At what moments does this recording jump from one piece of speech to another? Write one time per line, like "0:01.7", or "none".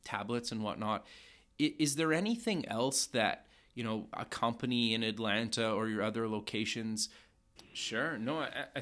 0:07.6

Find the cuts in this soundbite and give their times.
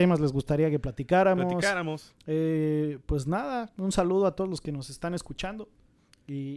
none

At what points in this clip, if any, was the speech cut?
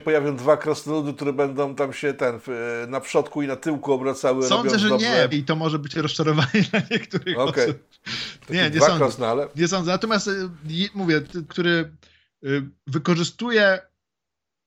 0:05.3
0:11.5
0:12.8

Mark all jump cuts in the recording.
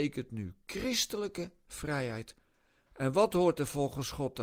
0:02.9

